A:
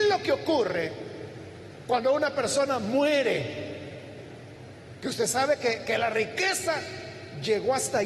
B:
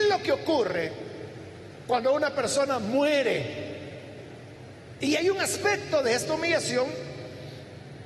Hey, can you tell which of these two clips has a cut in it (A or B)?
B